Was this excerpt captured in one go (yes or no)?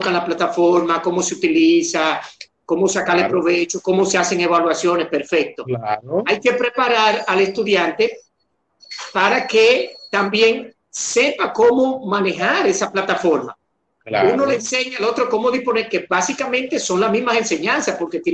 yes